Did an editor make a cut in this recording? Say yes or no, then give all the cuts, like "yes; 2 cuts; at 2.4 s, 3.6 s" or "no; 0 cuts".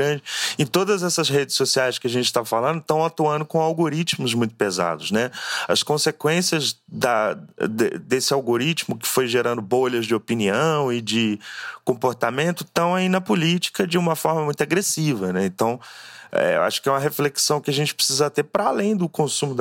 no; 0 cuts